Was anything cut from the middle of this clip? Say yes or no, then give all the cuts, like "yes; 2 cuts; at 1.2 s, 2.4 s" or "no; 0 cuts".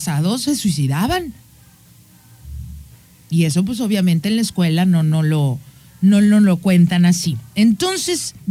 no; 0 cuts